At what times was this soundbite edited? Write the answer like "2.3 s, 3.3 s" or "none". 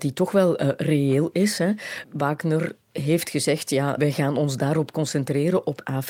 4.0 s